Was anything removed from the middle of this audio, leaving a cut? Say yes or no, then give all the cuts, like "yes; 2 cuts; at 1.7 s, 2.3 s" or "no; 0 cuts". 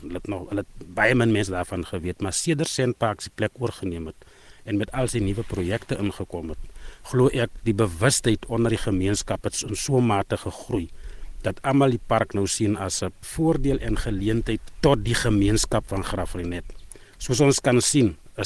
no; 0 cuts